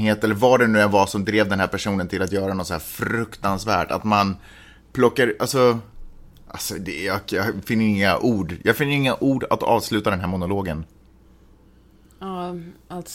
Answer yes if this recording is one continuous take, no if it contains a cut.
yes